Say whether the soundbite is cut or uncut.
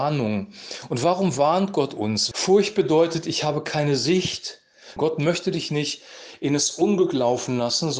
cut